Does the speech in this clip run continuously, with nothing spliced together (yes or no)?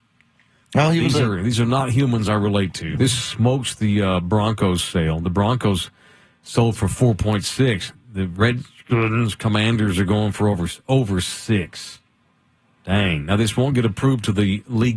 no